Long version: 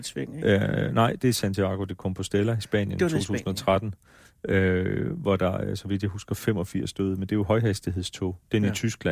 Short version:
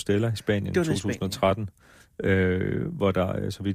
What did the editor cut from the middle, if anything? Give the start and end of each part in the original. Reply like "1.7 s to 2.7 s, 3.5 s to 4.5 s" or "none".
none